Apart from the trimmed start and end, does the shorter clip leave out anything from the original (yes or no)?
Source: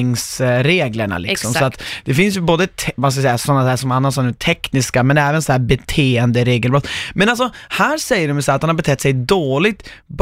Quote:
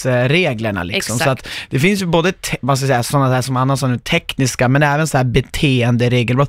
no